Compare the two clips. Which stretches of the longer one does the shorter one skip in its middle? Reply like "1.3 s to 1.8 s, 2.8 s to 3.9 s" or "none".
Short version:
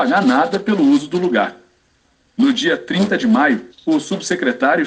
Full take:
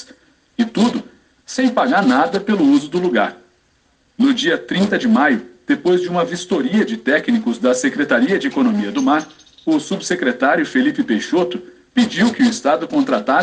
5.5 s to 9.5 s